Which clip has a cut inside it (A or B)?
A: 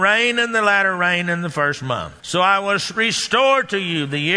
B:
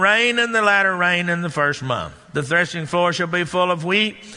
A